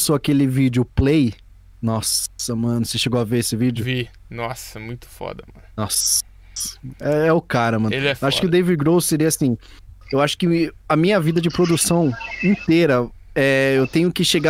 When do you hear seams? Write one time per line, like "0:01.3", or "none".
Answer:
none